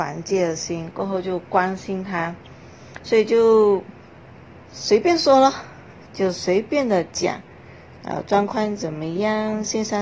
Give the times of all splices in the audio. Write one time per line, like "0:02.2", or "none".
0:08.0